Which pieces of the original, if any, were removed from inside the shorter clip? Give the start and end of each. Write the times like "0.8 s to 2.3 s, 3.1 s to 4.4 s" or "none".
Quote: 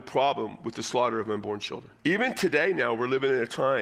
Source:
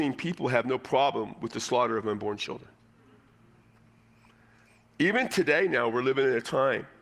2.8 s to 4.9 s